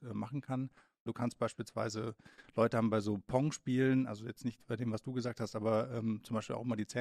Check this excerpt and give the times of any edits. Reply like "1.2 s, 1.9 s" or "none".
1.1 s